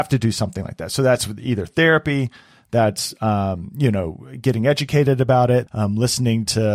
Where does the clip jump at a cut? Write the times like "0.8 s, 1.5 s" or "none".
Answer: 5.7 s